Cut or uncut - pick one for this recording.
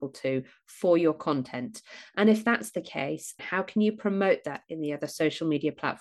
cut